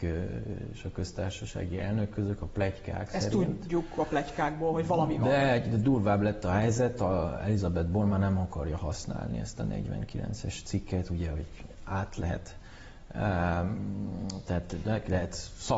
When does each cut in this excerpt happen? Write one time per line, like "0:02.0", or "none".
none